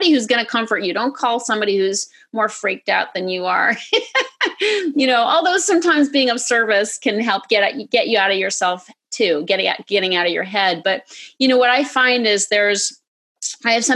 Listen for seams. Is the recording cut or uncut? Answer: uncut